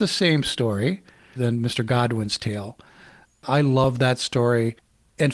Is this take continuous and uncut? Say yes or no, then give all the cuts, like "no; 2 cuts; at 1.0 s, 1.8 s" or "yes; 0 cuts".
no; 1 cut; at 1.4 s